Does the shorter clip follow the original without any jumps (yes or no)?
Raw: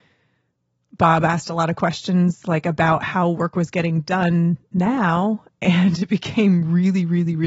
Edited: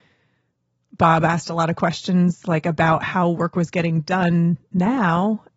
yes